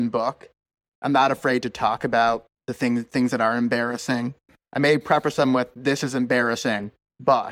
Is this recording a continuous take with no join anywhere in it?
no; 1 cut; at 2.5 s

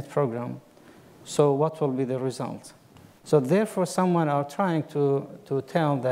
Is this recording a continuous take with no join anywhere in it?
no; 1 cut; at 3.2 s

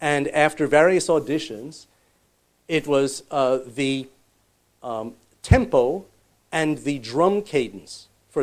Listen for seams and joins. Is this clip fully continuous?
yes; 0 cuts

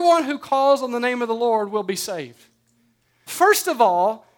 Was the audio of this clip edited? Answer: yes; 1 cut; at 3.3 s

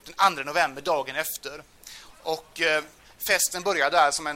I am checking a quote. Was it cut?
yes; 1 cut; at 2.1 s

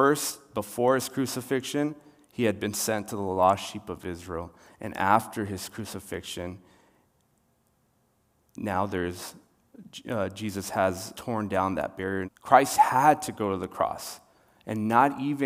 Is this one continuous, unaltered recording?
no; 2 cuts; at 11.1 s, 12.2 s

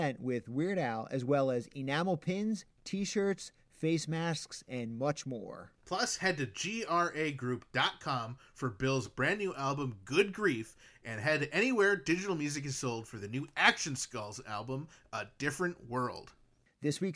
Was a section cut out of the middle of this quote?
no; 0 cuts

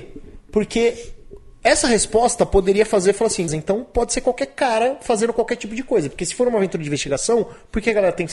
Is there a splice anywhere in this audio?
yes; 1 cut; at 3.5 s

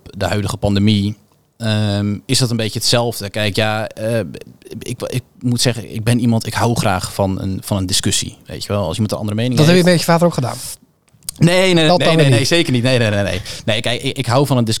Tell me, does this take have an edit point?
yes; 1 cut; at 11.9 s

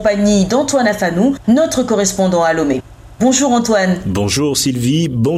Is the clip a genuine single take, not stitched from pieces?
yes; 0 cuts

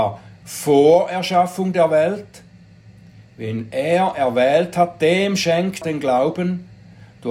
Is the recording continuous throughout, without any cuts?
no; 1 cut; at 5.8 s

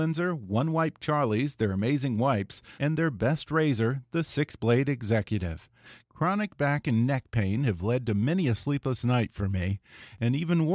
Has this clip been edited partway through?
yes; 2 cuts; at 2.8 s, 6.0 s

